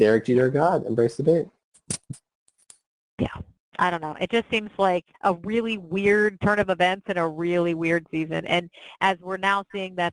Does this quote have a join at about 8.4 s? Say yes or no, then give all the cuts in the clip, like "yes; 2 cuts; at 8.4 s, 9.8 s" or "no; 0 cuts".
no; 1 cut; at 5.1 s